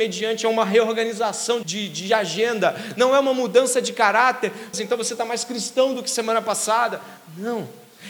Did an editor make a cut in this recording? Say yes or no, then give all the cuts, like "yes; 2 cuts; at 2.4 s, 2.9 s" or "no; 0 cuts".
yes; 2 cuts; at 1.6 s, 4.7 s